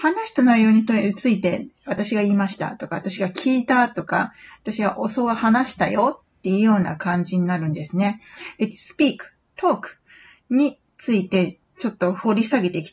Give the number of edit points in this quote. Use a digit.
1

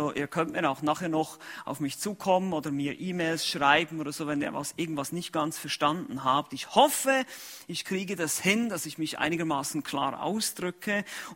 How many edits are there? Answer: 0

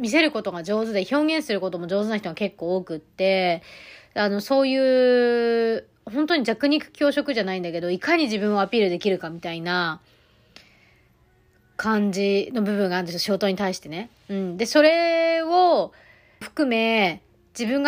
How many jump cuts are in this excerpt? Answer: 1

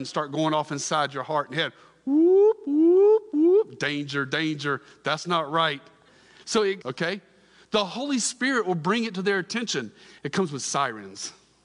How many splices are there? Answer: 2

